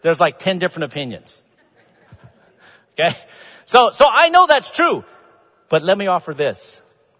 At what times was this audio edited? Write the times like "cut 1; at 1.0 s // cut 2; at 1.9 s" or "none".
none